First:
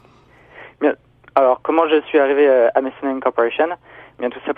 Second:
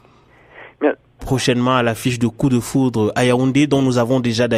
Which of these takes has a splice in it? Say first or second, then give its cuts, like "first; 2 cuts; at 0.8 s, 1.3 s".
second; 1 cut; at 1.2 s